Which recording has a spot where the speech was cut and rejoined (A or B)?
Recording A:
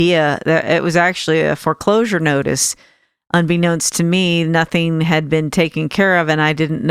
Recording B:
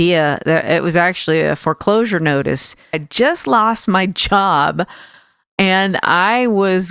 B